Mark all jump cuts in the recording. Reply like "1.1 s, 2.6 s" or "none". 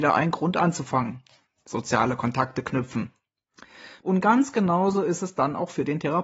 4.0 s